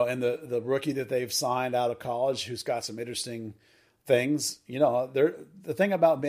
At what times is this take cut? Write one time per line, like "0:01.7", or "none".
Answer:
none